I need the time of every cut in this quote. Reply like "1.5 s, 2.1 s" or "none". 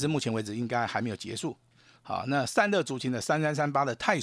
none